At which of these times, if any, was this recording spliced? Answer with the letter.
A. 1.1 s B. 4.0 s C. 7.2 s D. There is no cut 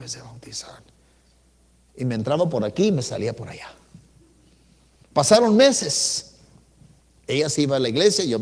C